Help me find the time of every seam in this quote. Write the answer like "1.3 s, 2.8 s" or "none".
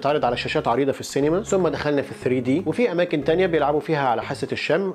none